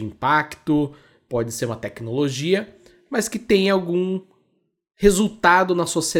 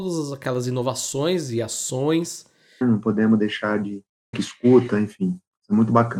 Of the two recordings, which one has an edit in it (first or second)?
second